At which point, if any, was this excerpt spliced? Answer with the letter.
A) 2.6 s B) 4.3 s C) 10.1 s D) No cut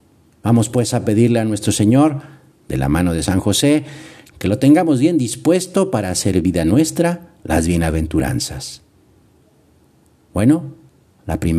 B